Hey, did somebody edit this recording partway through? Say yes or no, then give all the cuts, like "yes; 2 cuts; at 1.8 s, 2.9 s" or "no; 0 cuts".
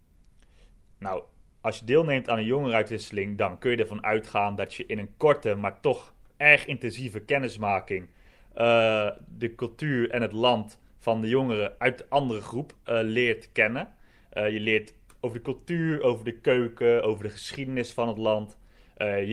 no; 0 cuts